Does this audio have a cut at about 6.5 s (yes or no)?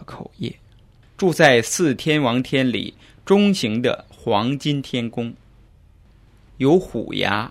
yes